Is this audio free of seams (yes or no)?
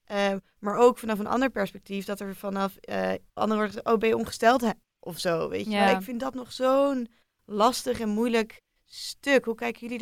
no